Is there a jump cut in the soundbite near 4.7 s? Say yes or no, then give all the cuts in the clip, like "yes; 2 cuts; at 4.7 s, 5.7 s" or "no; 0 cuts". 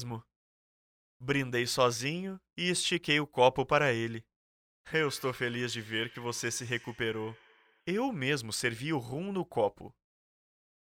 no; 1 cut; at 7.8 s